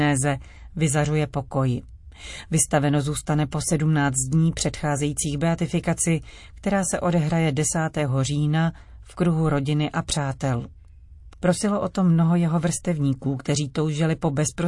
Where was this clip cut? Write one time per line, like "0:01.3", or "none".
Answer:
0:11.3